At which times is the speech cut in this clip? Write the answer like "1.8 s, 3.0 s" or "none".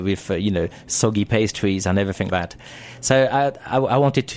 2.3 s